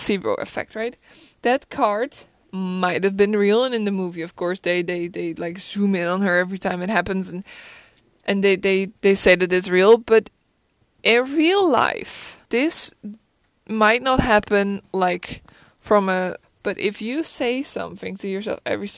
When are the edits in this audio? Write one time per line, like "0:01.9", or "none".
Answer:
0:12.5
0:16.4